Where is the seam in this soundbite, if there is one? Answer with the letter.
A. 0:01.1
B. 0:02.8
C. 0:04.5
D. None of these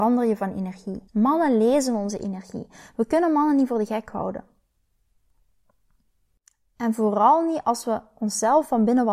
A